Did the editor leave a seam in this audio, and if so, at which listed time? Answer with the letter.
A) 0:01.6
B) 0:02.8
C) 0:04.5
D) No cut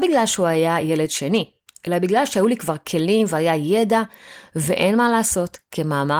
D